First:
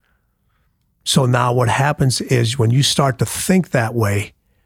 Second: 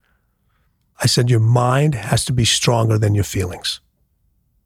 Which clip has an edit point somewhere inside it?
second; 1 cut; at 0.9 s

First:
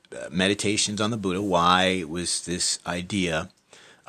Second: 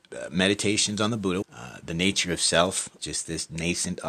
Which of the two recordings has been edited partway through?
second; 2 cuts; at 1.4 s, 3.0 s

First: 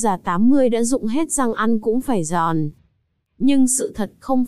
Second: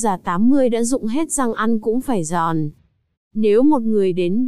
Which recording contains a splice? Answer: second; 1 cut; at 3.1 s

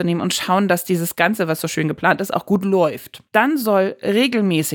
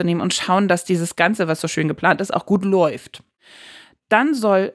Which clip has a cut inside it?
first; 1 cut; at 3.3 s

